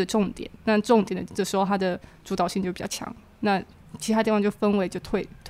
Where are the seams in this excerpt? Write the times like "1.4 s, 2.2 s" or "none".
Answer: 1.3 s